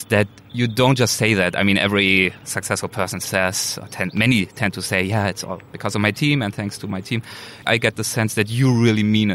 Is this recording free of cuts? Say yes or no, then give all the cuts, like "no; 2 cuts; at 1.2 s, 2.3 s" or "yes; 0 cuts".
yes; 0 cuts